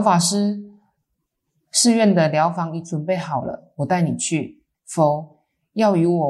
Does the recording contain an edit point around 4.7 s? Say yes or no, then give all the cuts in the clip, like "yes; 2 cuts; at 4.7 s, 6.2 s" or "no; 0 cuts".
yes; 1 cut; at 4.7 s